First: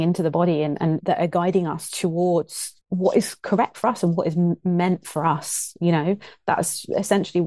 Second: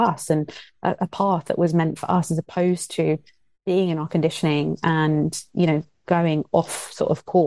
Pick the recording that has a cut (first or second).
first